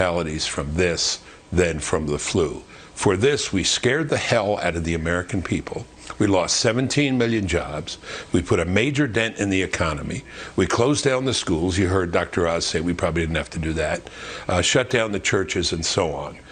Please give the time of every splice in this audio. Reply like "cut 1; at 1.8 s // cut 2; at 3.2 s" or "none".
none